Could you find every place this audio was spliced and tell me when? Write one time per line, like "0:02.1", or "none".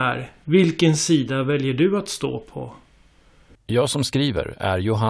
0:03.6